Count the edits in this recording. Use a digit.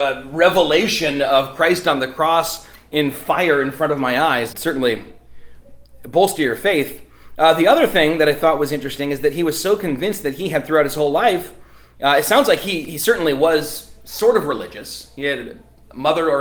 1